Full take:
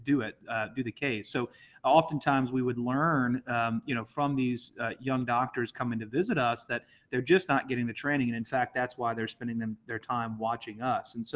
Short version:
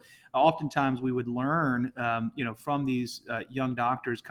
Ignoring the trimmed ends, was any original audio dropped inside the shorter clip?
no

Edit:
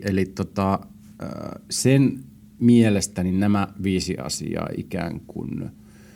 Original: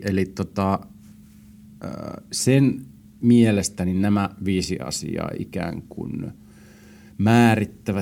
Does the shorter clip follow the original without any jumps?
no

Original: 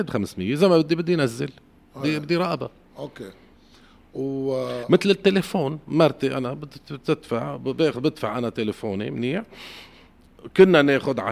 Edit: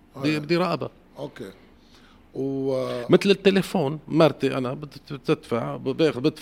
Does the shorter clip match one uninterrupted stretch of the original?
yes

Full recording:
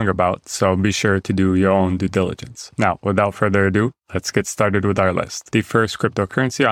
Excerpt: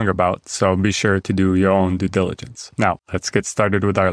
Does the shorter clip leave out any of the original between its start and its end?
yes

